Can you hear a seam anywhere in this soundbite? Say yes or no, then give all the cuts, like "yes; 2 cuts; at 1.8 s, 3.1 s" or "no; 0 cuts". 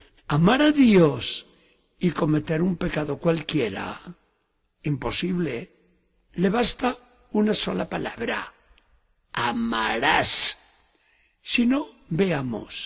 yes; 1 cut; at 6.3 s